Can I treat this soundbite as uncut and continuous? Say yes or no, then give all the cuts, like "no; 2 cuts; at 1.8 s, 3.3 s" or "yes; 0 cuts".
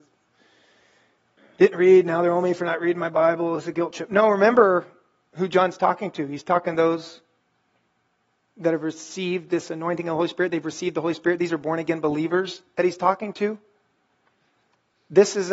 yes; 0 cuts